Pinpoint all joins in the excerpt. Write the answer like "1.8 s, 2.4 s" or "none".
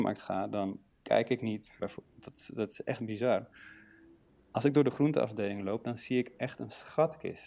1.8 s